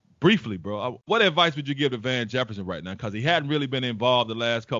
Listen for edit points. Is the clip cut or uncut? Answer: cut